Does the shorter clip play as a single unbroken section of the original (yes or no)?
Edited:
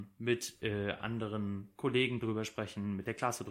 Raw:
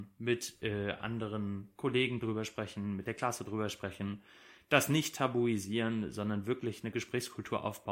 yes